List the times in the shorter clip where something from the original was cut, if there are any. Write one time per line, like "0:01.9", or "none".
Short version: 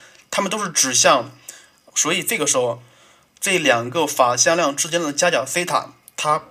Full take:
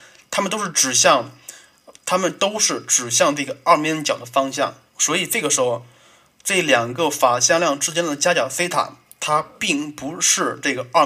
0:01.9